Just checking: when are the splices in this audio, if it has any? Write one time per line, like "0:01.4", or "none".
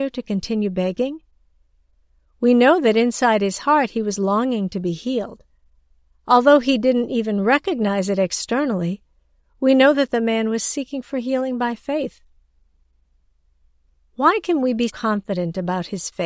0:14.9